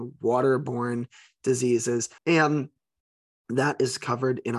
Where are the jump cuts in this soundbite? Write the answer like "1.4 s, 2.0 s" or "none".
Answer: 2.2 s